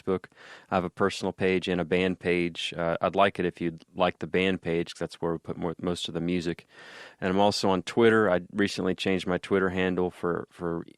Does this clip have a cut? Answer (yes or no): no